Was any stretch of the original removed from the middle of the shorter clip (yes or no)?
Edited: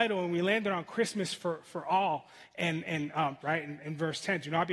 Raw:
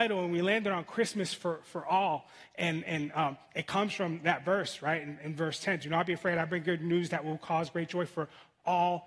yes